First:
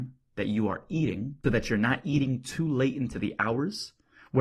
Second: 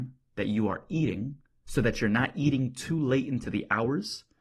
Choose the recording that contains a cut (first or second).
first